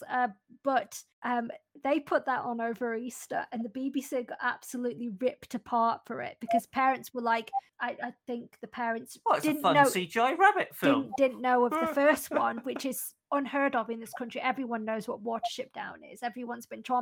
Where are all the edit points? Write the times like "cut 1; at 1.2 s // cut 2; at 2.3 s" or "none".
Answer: none